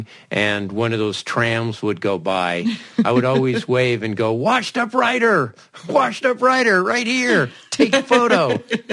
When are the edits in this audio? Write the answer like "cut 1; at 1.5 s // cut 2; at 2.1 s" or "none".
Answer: none